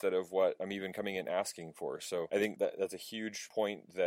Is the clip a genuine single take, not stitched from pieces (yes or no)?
yes